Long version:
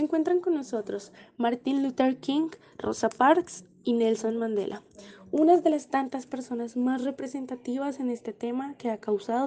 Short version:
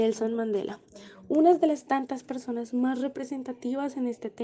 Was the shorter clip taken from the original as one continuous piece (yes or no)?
yes